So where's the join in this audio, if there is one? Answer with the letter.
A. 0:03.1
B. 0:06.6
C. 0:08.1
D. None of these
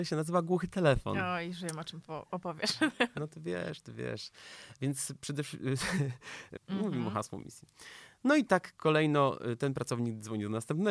B